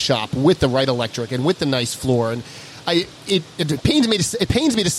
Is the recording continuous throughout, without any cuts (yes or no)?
no